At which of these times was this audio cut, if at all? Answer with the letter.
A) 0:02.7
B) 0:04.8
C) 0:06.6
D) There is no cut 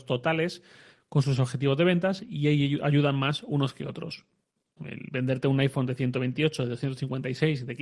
B